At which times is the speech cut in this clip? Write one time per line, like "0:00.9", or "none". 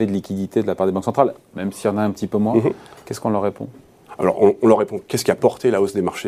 none